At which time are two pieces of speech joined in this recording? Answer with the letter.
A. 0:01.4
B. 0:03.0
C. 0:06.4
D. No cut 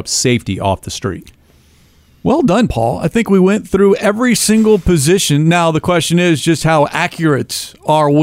D